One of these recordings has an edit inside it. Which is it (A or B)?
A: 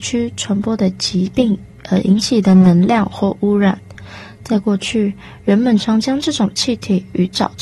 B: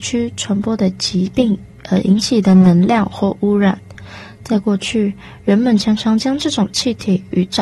A